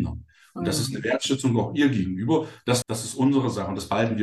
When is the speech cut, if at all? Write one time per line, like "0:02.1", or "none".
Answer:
0:02.8